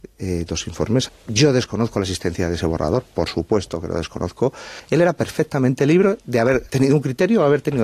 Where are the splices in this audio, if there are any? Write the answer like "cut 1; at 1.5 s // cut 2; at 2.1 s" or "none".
cut 1; at 1.1 s // cut 2; at 6.7 s